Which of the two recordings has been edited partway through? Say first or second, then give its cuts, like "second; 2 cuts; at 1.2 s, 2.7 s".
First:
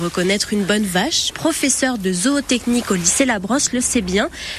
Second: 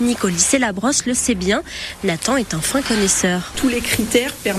first; 1 cut; at 1.3 s